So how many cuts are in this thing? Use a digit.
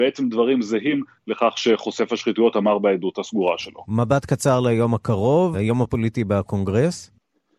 1